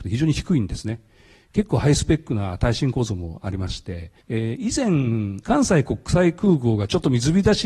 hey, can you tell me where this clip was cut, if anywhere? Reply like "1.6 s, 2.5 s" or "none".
4.2 s, 5.4 s